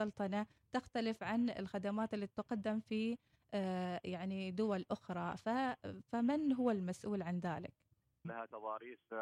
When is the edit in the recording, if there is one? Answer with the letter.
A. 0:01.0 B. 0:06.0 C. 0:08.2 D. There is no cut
C